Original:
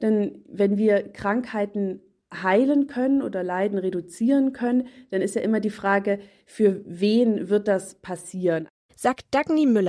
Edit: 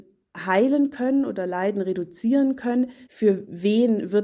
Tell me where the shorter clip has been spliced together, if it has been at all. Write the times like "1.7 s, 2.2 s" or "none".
3.1 s